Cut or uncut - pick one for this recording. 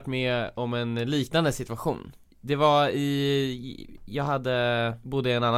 uncut